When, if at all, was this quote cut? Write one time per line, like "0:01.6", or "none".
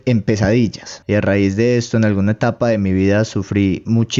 0:01.0